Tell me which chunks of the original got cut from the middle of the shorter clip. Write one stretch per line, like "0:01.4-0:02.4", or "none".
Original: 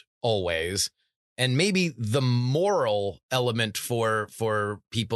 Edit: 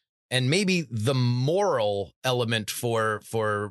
none